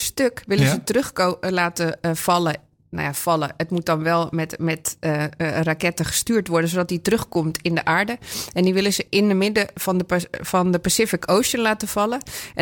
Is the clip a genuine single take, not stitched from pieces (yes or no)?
yes